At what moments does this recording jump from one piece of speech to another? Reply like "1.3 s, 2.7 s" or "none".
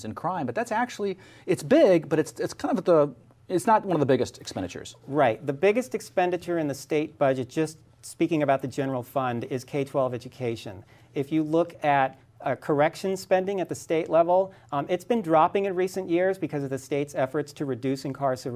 none